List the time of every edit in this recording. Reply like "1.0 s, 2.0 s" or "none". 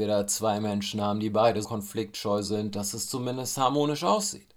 1.6 s